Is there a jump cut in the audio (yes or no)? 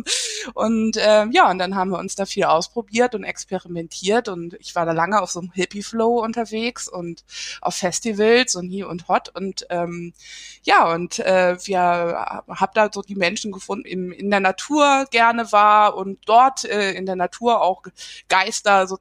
yes